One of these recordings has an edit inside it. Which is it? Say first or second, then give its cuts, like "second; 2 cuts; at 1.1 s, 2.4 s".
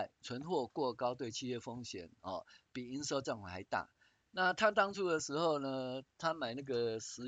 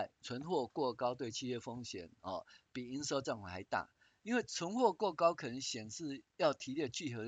first; 1 cut; at 4.2 s